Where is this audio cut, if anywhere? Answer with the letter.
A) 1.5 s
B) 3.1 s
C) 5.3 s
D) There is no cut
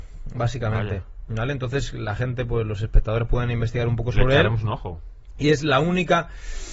D